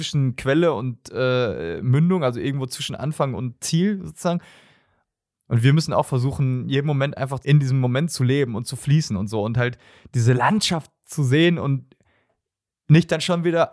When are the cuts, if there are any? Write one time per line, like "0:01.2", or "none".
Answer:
0:05.3
0:07.4